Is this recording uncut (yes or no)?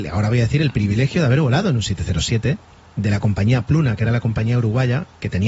yes